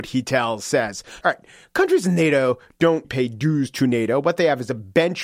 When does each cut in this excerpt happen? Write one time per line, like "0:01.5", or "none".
0:01.2
0:03.0